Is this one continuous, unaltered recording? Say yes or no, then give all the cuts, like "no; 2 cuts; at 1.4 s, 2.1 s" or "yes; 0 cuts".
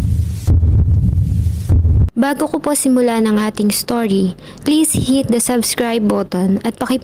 no; 1 cut; at 4.6 s